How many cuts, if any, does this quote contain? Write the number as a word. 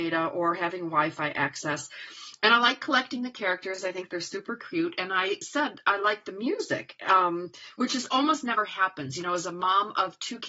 zero